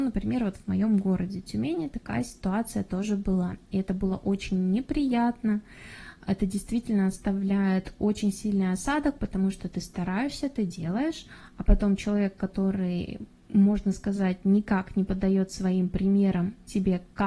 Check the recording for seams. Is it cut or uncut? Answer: uncut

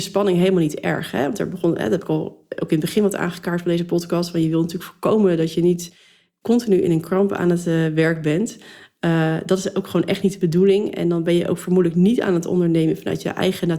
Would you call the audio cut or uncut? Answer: uncut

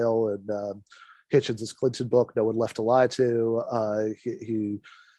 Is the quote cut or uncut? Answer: uncut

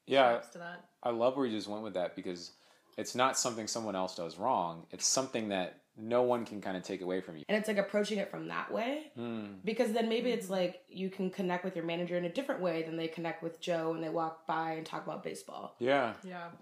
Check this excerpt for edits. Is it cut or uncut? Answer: cut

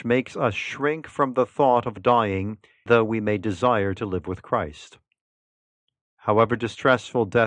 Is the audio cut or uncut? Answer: cut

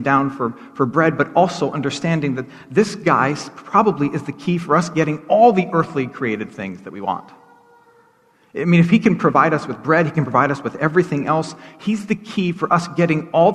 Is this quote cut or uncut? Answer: uncut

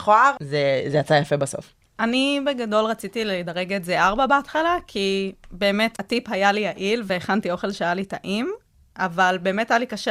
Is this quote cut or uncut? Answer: cut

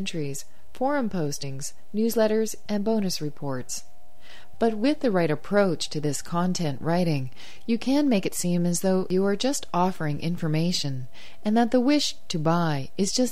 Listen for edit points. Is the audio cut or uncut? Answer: cut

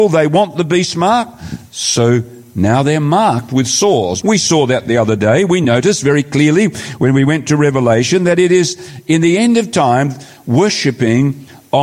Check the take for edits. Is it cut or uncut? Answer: cut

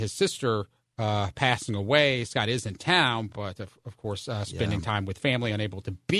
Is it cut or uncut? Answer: uncut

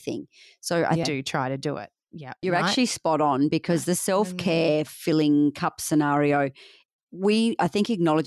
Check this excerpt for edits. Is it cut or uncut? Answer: cut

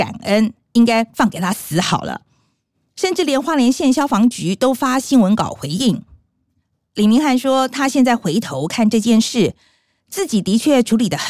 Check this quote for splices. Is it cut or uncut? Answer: uncut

